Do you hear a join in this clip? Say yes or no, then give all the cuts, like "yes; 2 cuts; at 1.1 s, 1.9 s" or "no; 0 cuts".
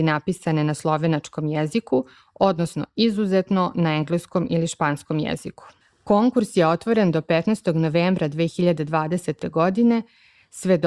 no; 0 cuts